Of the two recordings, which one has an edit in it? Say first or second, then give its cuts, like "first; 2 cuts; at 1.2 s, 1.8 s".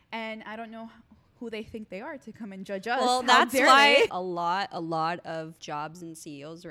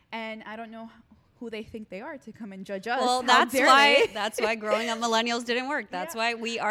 first; 2 cuts; at 4.1 s, 5.6 s